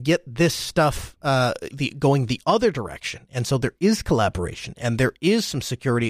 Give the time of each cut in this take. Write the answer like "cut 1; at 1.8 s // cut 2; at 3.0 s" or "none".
cut 1; at 1.7 s